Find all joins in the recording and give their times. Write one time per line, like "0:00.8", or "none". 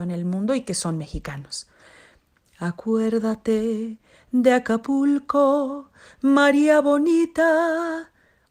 0:02.5